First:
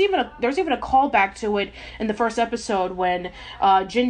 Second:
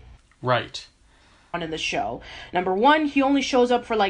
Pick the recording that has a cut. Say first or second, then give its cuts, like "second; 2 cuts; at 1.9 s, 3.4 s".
second; 1 cut; at 1.5 s